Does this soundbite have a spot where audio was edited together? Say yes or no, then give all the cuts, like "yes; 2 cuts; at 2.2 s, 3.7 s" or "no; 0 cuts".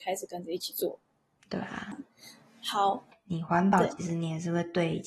yes; 1 cut; at 3.1 s